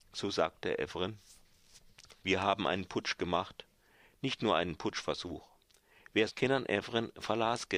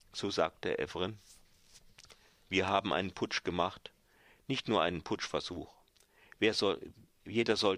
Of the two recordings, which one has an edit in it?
first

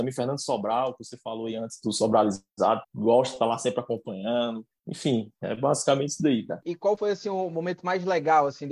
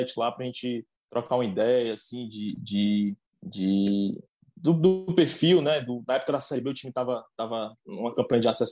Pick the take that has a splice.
first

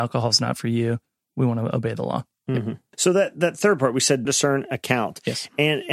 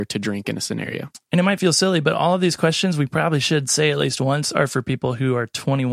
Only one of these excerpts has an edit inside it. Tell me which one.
first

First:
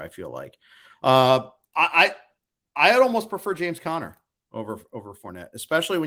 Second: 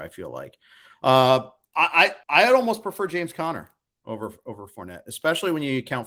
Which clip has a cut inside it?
second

